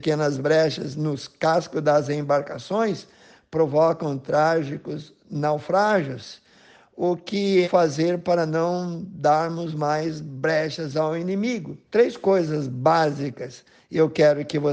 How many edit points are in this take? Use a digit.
2